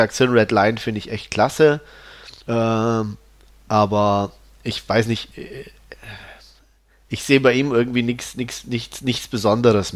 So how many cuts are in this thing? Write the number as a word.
one